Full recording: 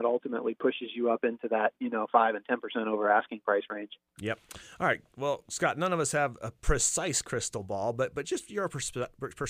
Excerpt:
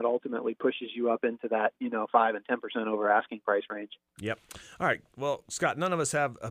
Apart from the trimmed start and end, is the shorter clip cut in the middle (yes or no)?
no